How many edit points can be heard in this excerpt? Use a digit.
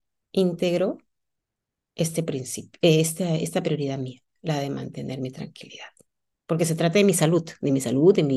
0